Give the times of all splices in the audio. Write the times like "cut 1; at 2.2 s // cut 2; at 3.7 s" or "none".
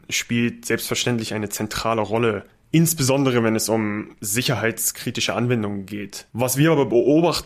cut 1; at 6.3 s